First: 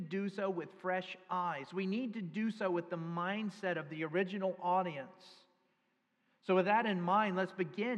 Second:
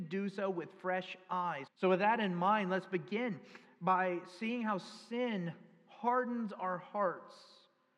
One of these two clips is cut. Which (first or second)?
second